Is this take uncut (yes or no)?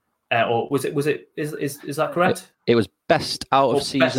yes